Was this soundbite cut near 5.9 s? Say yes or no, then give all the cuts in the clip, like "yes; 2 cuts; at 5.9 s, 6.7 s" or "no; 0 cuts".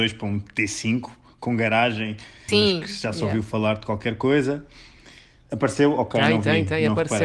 no; 1 cut; at 2.5 s